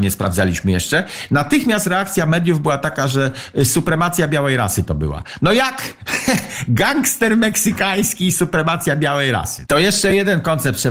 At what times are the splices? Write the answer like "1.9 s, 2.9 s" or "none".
9.6 s